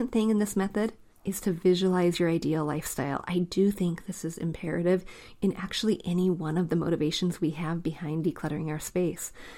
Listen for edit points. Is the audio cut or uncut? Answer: uncut